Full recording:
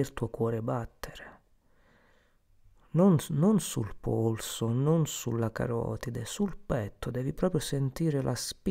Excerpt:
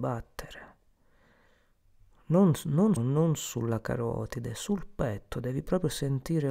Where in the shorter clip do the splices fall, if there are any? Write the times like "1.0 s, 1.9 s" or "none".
3.0 s